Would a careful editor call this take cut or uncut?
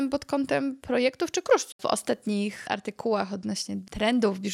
cut